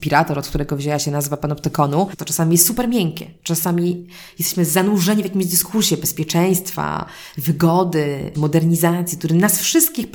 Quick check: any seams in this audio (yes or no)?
yes